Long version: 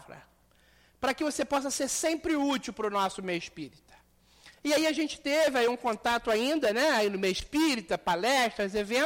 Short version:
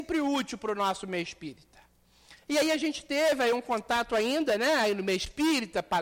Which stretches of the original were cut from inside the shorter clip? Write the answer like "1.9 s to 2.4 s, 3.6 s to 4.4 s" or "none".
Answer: none